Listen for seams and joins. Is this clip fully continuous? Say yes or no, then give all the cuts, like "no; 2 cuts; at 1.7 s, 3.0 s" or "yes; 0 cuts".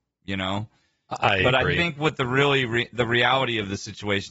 yes; 0 cuts